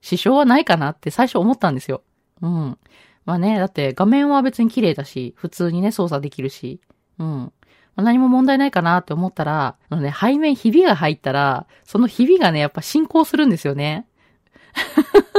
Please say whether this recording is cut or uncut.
cut